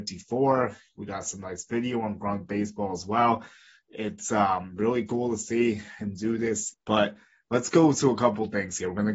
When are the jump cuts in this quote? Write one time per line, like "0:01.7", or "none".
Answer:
0:06.7